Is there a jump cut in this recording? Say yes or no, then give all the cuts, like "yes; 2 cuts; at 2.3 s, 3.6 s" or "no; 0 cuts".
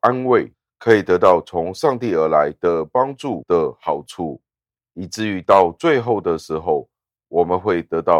no; 0 cuts